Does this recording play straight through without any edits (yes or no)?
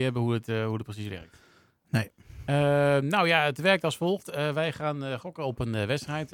yes